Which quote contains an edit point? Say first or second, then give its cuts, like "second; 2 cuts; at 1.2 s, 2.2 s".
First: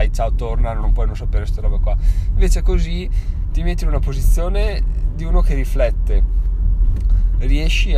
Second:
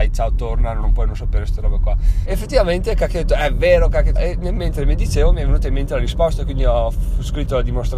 second; 2 cuts; at 2.3 s, 4.2 s